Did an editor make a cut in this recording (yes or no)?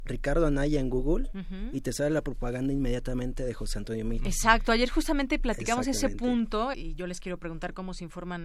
yes